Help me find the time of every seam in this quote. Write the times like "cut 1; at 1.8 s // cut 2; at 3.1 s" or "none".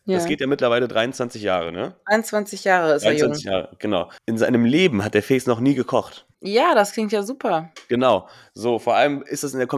cut 1; at 4.2 s // cut 2; at 6.3 s